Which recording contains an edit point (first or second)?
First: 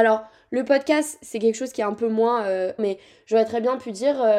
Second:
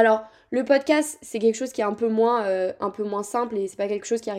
first